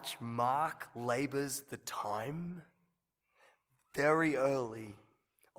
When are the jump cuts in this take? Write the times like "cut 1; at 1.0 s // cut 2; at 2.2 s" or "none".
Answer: none